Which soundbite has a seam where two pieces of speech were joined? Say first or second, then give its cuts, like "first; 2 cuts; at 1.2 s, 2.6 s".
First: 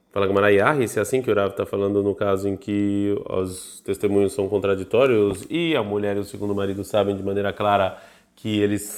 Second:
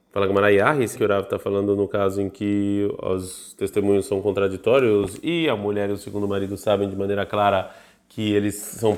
second; 1 cut; at 1.0 s